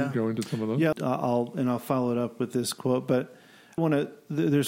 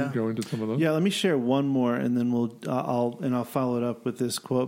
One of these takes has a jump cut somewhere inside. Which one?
first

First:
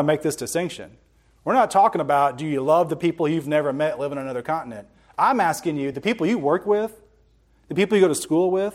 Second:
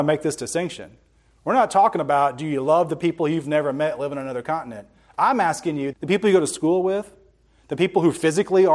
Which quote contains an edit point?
second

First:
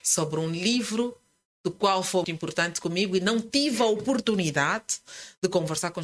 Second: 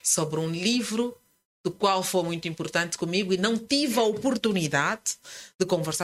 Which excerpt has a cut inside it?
first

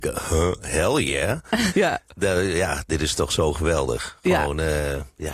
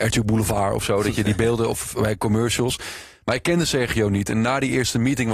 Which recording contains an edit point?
first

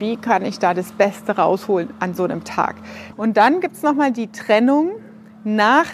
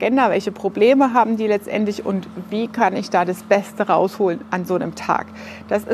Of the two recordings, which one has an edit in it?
first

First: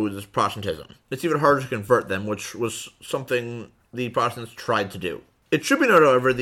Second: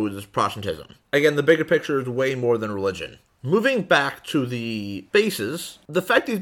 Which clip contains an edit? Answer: first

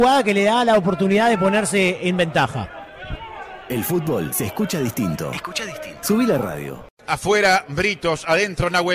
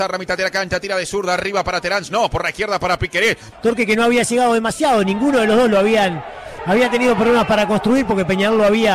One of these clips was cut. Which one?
second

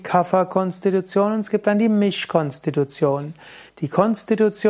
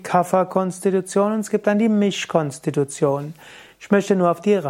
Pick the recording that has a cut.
first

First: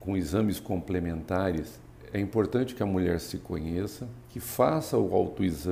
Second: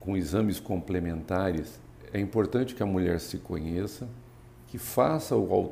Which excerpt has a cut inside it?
first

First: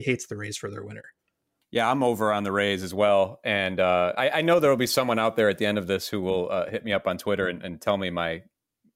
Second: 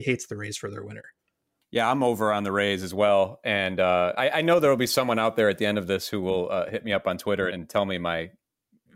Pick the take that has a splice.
second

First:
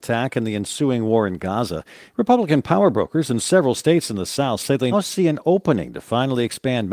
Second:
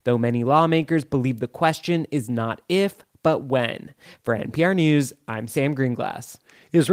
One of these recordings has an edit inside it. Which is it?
first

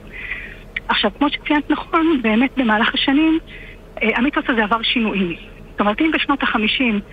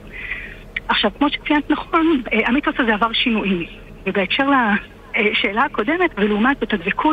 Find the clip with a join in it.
second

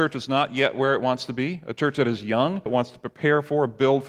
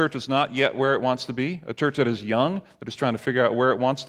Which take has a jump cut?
first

